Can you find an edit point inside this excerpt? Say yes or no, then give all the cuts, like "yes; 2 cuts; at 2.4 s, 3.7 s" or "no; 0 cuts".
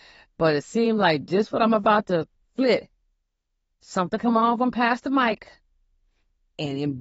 no; 0 cuts